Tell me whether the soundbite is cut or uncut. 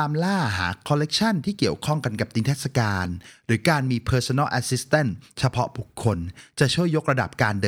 uncut